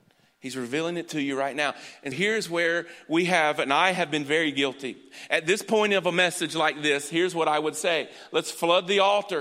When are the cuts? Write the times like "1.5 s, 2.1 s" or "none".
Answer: 2.1 s